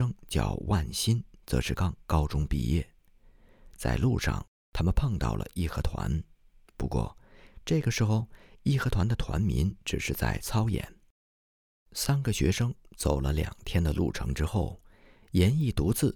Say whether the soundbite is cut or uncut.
cut